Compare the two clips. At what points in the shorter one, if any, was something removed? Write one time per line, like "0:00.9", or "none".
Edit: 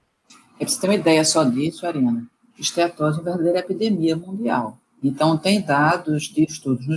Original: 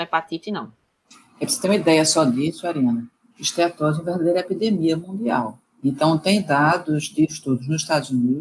none